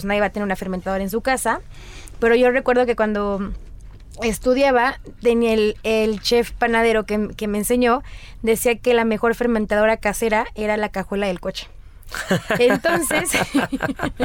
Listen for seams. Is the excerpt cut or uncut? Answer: uncut